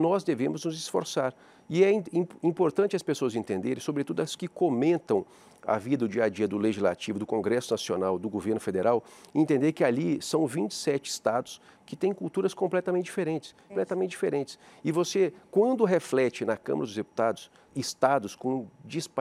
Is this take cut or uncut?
cut